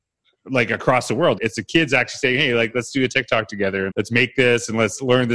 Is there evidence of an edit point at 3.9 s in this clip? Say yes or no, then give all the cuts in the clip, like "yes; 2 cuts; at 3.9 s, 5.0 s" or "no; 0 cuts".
yes; 2 cuts; at 1.4 s, 3.9 s